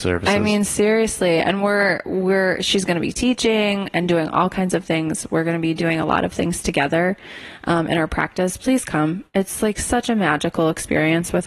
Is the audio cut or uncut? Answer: uncut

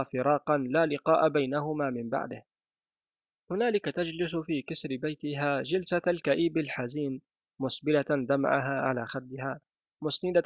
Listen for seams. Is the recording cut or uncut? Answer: uncut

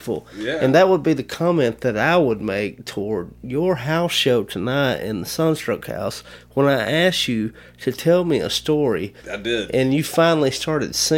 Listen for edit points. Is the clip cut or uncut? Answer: cut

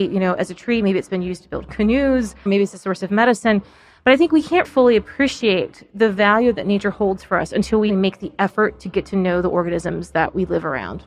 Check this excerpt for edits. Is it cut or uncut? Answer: cut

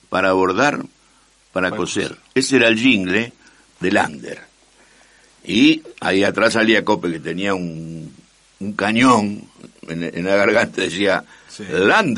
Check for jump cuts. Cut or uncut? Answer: uncut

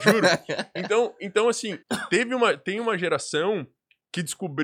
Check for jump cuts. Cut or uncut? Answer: cut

